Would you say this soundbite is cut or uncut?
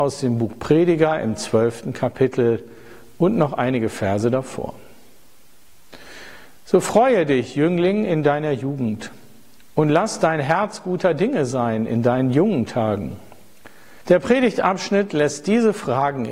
cut